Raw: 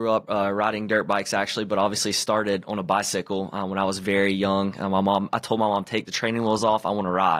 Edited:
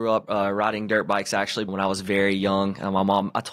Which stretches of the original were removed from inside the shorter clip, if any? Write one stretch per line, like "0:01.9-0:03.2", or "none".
0:01.7-0:03.7